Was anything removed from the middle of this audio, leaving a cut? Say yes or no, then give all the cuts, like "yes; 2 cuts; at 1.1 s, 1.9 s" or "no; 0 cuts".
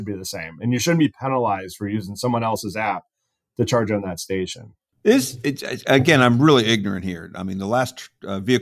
no; 0 cuts